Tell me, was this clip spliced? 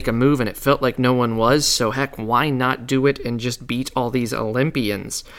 no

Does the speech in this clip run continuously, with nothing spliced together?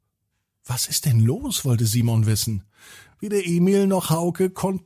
yes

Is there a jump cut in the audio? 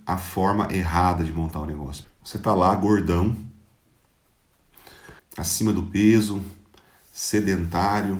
yes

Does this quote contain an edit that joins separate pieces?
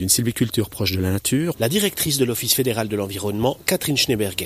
yes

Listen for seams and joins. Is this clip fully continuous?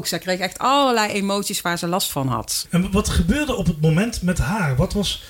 no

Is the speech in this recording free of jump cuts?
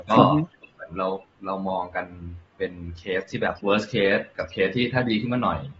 no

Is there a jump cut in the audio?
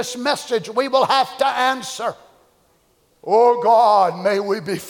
no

